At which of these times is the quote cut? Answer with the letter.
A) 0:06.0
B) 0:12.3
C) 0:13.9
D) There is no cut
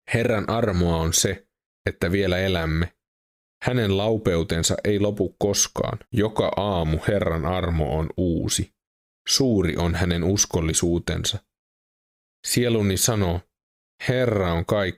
A